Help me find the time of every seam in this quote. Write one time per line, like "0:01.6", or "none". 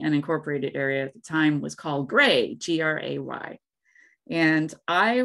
none

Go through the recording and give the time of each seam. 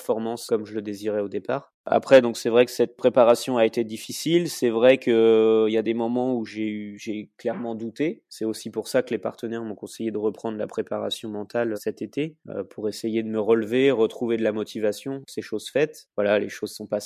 0:11.7

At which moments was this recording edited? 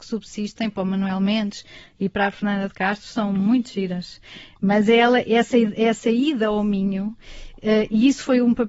none

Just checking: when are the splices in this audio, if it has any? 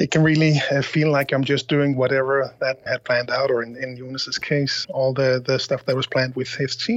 0:02.9
0:04.8

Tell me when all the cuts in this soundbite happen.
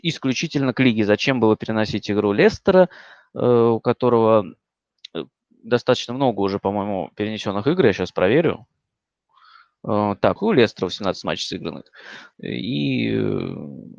0:10.4
0:12.3

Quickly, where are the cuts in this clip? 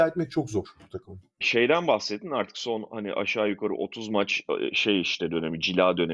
none

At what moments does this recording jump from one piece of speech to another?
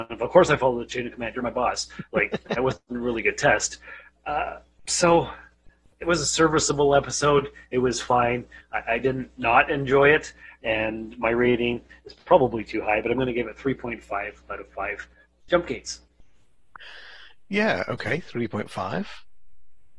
none

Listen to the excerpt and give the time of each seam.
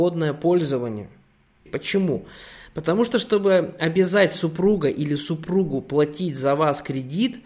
0:01.7

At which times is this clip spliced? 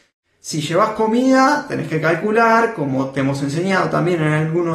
none

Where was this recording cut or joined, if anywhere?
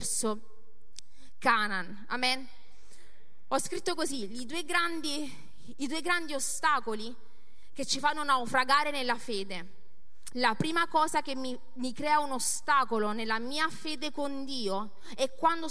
0:10.3

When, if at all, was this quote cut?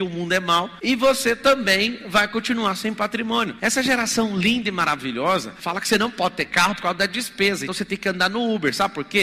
0:07.7

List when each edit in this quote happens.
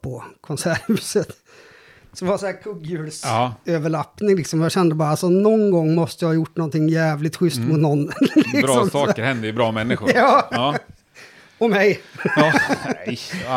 none

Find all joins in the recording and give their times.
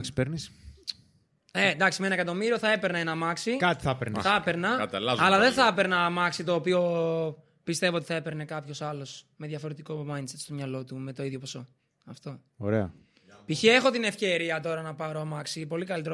none

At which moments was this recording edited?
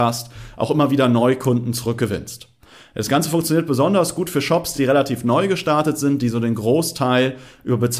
none

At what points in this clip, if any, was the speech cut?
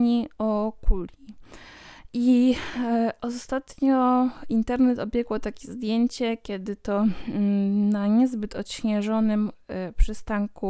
0:02.1

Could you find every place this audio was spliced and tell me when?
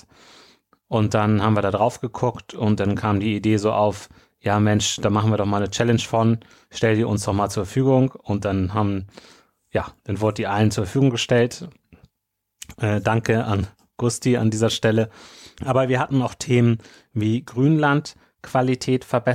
0:15.6

